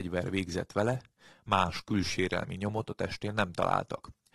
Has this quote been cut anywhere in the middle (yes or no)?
no